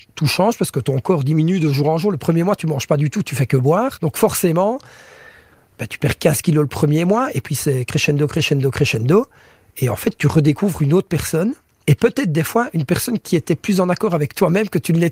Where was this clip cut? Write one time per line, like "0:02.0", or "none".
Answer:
none

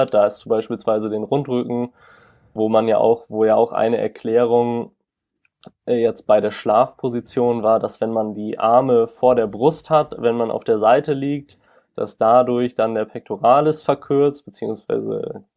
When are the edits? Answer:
0:02.6

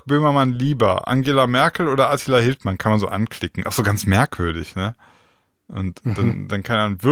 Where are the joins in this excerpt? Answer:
none

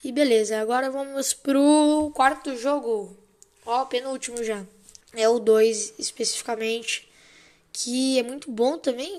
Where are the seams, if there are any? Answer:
0:05.0

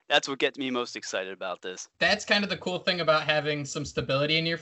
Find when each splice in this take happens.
0:01.9

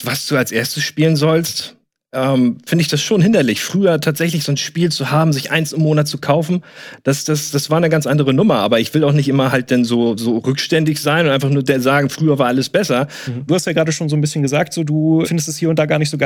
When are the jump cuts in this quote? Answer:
0:13.5
0:15.2

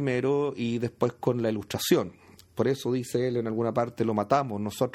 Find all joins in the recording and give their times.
0:02.5

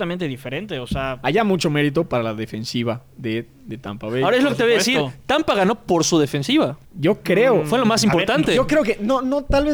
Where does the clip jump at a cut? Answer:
0:06.8

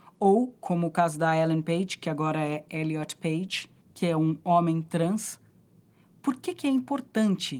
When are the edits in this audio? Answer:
0:03.8

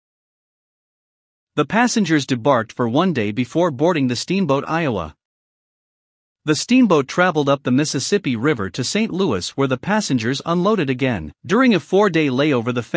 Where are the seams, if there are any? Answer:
0:11.4

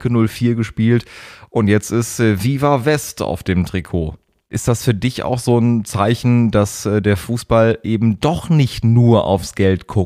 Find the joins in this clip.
none

